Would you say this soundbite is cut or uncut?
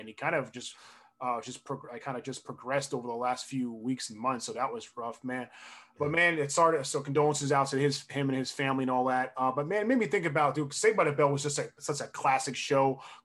uncut